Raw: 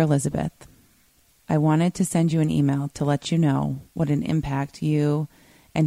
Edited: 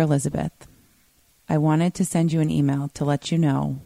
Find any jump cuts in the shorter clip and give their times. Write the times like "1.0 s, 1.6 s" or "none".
none

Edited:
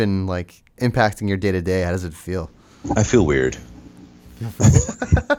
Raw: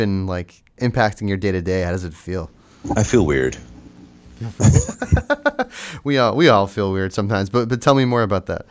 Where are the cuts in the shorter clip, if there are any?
none

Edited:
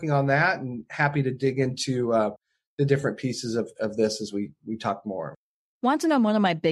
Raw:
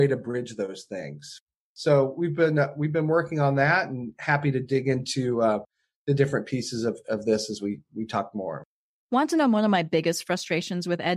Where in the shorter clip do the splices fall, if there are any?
none

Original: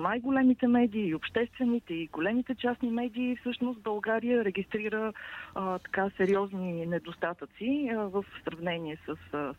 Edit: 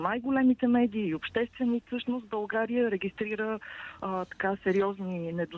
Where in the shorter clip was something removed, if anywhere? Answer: 1.9 s

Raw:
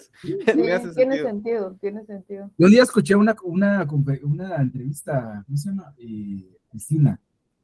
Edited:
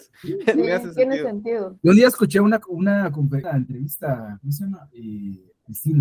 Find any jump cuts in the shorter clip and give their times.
1.8 s, 3.4 s

